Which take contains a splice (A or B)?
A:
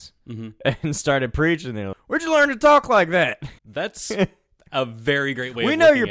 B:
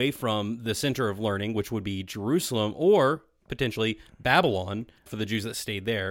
A